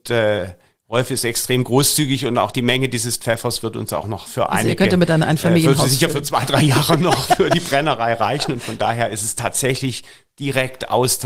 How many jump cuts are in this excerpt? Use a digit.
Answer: 0